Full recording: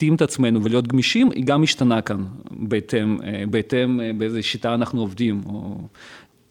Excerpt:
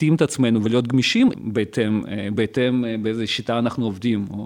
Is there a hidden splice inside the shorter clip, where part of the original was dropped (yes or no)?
yes